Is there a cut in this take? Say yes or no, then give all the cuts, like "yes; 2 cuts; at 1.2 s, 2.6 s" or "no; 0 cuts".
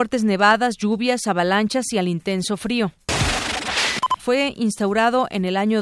yes; 1 cut; at 4.2 s